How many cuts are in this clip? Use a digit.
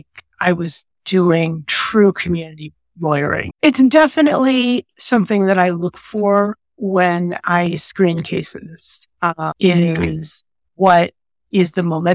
1